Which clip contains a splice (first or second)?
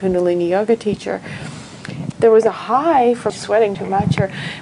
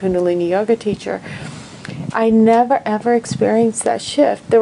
first